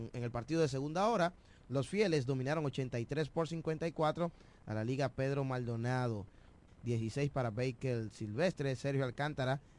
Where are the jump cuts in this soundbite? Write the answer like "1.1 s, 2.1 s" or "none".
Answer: 6.7 s